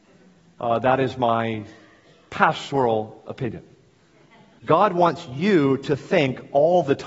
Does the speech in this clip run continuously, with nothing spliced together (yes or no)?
no